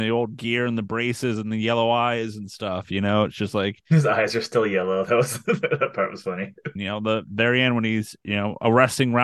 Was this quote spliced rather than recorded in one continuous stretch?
yes; 1 cut; at 6.8 s

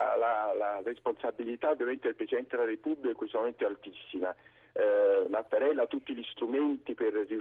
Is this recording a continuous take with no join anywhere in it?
yes; 0 cuts

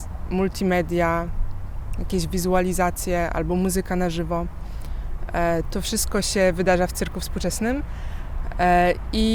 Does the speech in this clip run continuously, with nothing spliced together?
yes; 0 cuts

